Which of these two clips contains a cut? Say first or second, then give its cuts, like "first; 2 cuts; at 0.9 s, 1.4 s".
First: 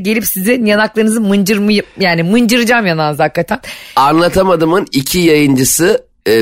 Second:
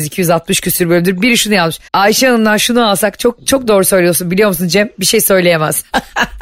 second; 1 cut; at 1.9 s